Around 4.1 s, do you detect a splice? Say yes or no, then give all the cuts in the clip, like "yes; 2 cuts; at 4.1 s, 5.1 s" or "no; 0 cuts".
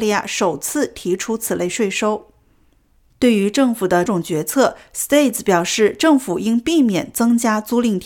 yes; 1 cut; at 4.1 s